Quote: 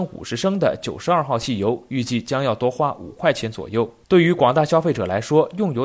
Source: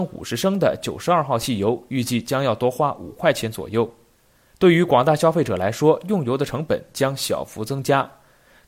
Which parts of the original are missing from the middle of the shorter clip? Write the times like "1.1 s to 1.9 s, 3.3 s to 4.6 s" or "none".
4.0 s to 4.5 s